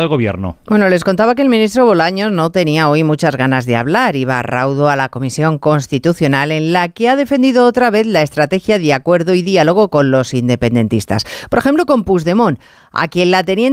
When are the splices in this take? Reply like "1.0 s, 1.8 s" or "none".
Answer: none